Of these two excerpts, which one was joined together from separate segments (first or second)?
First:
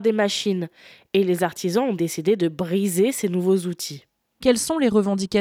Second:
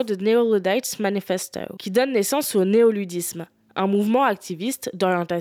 first